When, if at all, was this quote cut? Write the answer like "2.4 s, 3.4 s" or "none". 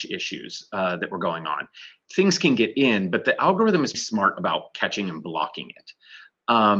2.1 s, 3.9 s